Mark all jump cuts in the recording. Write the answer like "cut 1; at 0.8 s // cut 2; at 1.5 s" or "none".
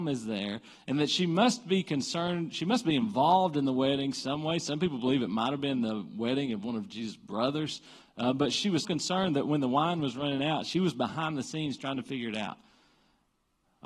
cut 1; at 8.8 s

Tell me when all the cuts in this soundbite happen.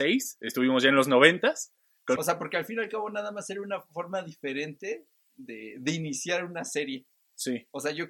cut 1; at 2.2 s

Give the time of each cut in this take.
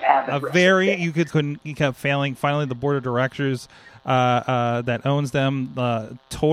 cut 1; at 1.3 s

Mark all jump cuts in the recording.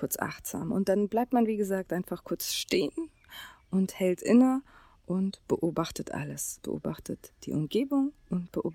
none

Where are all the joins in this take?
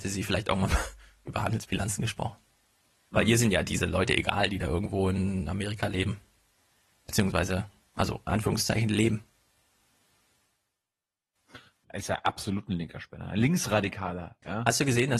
cut 1; at 11.8 s

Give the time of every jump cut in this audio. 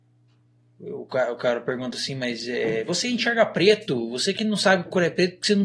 none

